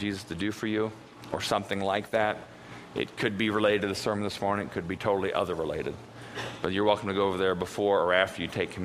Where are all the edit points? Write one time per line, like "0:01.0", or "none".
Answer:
none